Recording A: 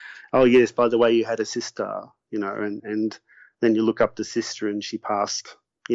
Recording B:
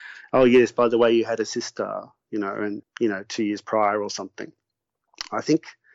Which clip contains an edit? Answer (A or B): B